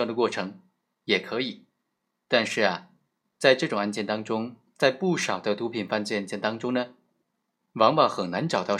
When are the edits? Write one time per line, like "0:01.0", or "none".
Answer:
none